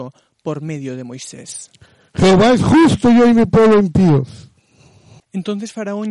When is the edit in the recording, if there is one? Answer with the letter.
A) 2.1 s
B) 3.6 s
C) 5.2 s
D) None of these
C